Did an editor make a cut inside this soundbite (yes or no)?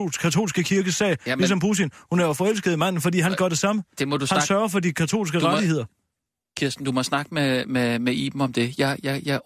no